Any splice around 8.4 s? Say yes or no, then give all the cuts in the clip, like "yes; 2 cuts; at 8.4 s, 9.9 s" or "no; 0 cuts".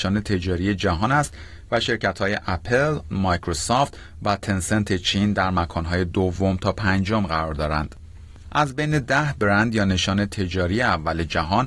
yes; 2 cuts; at 3.1 s, 8.4 s